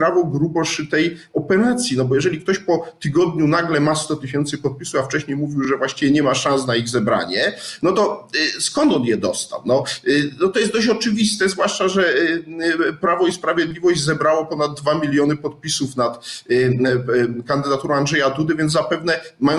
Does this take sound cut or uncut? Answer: uncut